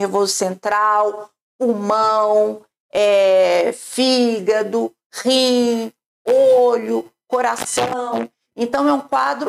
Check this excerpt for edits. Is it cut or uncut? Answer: uncut